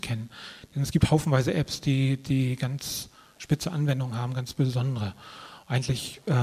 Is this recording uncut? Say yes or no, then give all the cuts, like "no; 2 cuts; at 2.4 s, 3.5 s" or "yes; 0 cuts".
yes; 0 cuts